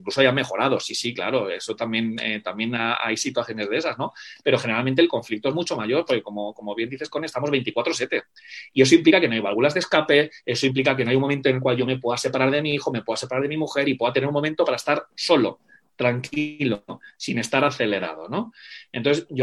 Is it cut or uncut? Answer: uncut